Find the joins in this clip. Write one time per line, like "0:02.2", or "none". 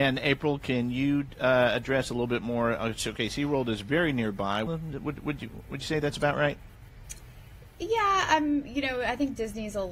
0:04.7